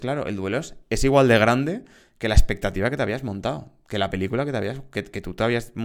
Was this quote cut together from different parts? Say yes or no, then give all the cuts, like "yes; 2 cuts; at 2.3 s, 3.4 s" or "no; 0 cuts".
no; 0 cuts